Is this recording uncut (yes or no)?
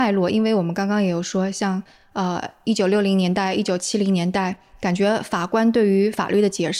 yes